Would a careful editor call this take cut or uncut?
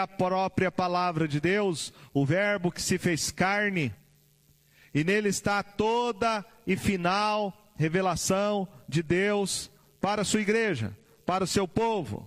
uncut